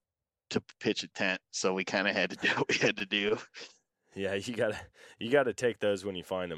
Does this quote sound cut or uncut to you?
uncut